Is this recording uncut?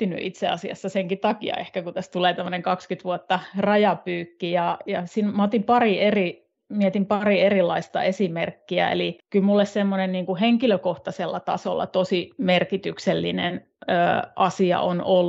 yes; 0 cuts

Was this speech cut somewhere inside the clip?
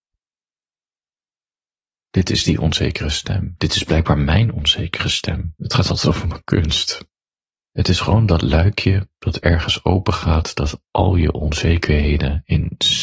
yes; 2 cuts; at 5.6 s, 7.6 s

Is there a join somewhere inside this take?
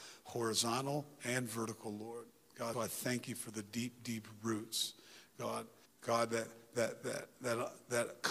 yes; 2 cuts; at 2.7 s, 5.9 s

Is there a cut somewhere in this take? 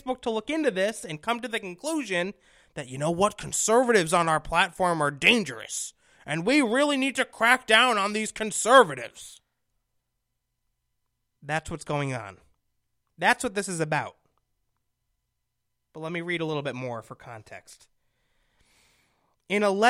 no; 0 cuts

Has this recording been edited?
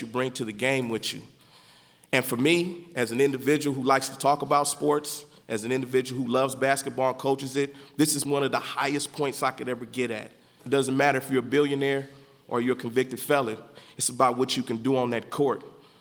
yes; 2 cuts; at 8.2 s, 10.6 s

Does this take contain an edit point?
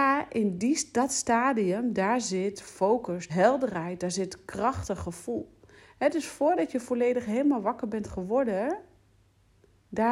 yes; 1 cut; at 3.3 s

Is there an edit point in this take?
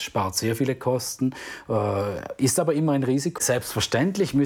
yes; 1 cut; at 3.4 s

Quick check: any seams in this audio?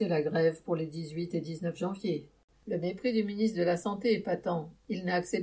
yes; 1 cut; at 2.5 s

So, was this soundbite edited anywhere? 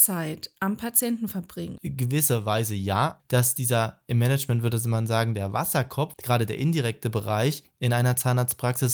yes; 3 cuts; at 1.8 s, 3.2 s, 6.1 s

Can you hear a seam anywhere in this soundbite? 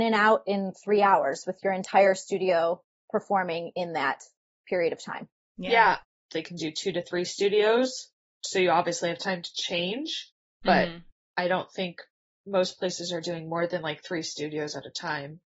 yes; 1 cut; at 6.3 s

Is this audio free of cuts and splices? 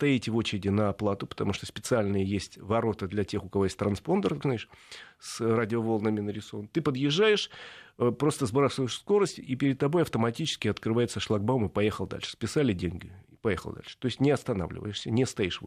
no; 1 cut; at 4.4 s

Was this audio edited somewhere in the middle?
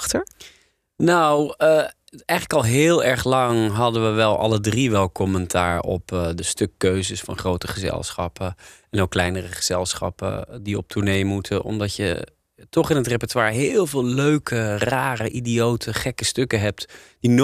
no; 0 cuts

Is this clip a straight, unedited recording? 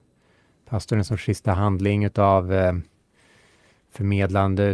yes; 0 cuts

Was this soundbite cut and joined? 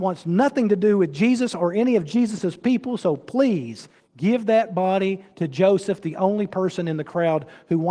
no; 0 cuts

